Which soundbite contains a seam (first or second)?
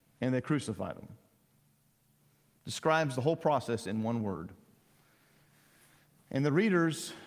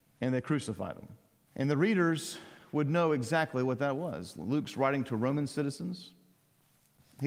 second